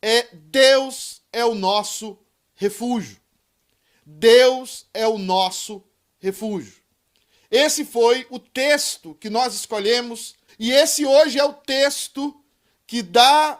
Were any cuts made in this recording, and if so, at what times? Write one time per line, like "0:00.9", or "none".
0:10.5